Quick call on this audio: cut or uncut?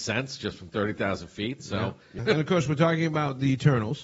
cut